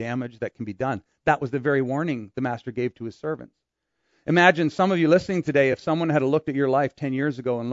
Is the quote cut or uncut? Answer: uncut